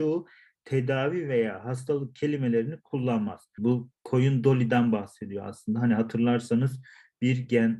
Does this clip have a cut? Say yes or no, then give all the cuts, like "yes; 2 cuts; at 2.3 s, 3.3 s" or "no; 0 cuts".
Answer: yes; 1 cut; at 3.6 s